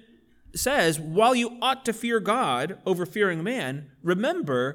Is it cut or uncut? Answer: uncut